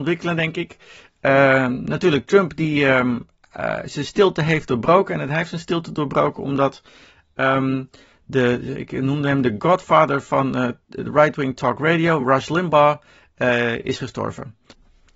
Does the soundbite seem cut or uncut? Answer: uncut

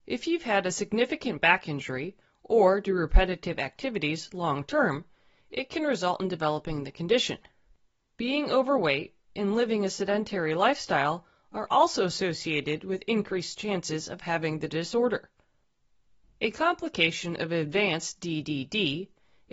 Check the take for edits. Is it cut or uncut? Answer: uncut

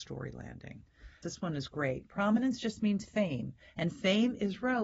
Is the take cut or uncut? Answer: cut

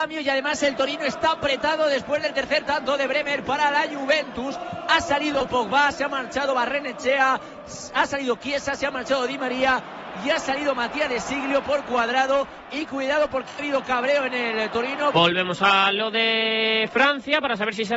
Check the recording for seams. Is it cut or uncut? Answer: cut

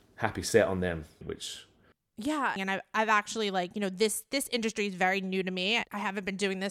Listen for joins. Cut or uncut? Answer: cut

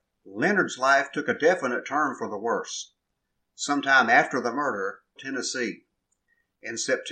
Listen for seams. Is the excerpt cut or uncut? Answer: cut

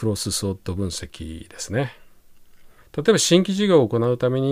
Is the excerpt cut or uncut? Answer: cut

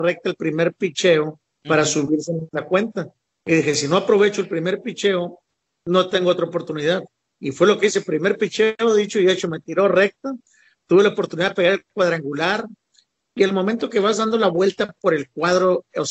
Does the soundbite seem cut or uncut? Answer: uncut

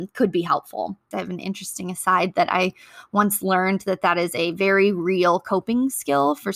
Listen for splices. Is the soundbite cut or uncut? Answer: cut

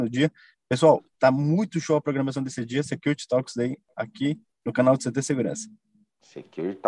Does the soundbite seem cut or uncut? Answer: uncut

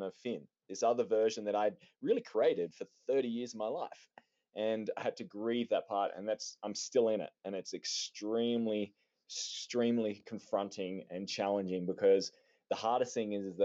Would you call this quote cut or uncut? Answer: uncut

